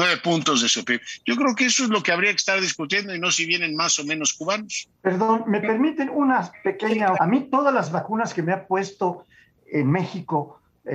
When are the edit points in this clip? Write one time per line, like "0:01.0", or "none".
0:04.9
0:07.1
0:09.5